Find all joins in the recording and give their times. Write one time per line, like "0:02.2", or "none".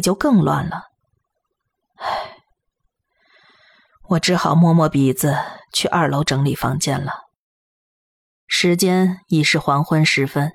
none